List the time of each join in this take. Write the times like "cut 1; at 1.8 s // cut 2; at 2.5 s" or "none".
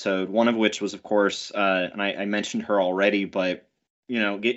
none